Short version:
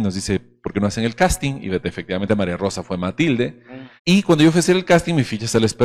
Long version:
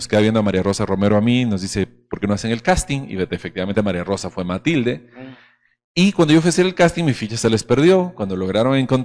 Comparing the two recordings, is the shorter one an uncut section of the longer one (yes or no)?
no